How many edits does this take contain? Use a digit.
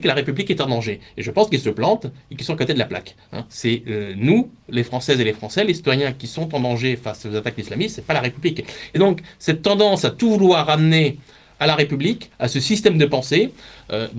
0